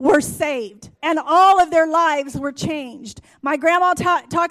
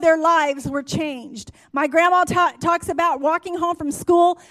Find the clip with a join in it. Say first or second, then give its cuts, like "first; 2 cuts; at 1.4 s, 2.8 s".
first; 1 cut; at 0.9 s